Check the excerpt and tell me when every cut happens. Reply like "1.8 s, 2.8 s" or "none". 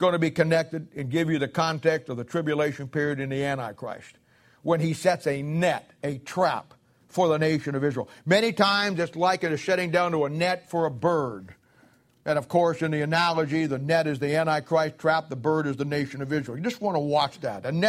none